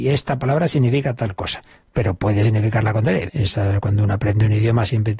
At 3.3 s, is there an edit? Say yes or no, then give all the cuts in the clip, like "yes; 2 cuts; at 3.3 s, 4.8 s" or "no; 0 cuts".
yes; 1 cut; at 3.3 s